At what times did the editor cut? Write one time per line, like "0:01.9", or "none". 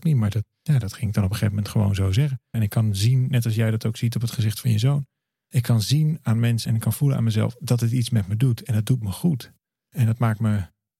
0:02.5
0:06.7